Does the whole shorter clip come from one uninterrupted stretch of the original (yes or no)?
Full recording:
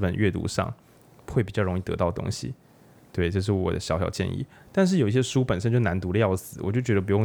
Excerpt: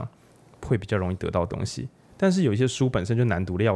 no